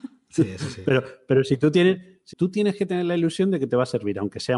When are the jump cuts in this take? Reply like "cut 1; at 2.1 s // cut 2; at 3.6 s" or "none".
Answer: cut 1; at 2.3 s